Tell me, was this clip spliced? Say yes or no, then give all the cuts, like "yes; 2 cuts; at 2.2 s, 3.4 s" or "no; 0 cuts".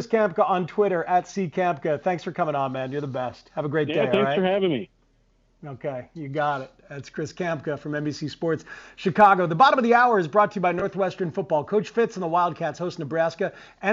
no; 0 cuts